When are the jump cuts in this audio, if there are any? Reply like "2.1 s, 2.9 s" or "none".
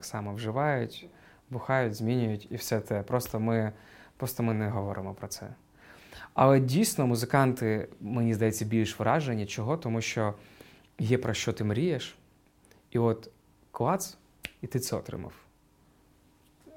none